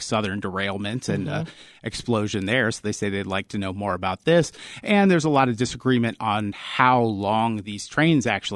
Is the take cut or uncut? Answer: uncut